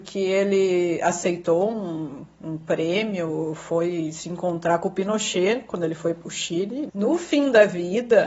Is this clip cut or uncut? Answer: cut